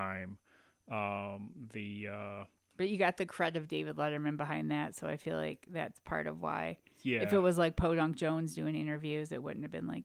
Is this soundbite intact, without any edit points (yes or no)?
yes